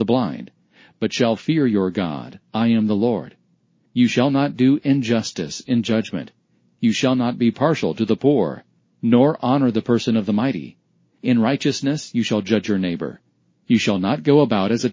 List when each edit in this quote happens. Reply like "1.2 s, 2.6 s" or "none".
none